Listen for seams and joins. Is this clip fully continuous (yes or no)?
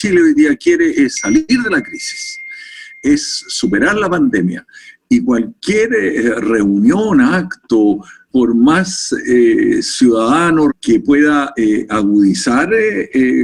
no